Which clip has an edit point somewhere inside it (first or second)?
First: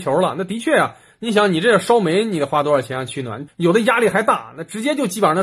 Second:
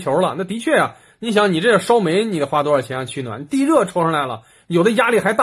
first